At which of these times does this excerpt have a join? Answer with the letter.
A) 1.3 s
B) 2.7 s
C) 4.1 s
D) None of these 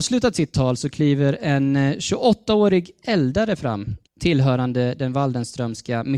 C